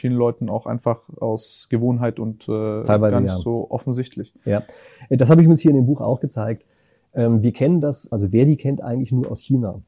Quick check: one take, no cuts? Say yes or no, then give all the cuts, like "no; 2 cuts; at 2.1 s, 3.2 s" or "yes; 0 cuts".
no; 1 cut; at 8.1 s